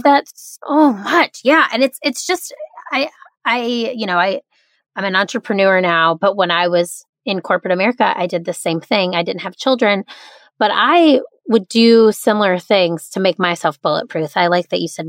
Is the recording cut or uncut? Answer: uncut